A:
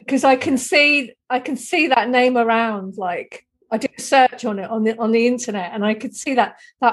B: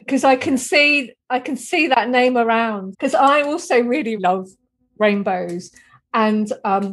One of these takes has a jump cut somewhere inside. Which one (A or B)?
B